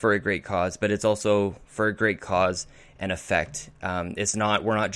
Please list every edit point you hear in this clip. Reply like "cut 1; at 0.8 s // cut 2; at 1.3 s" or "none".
none